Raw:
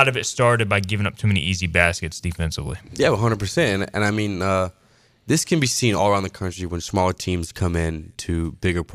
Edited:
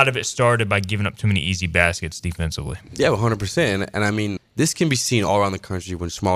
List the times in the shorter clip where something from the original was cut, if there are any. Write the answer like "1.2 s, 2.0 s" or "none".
4.4 s